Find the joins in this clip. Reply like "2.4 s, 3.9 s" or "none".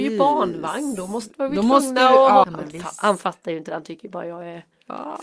2.4 s